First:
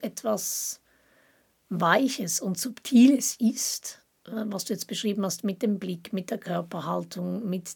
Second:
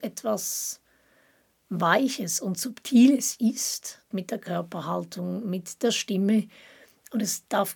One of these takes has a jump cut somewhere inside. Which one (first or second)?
second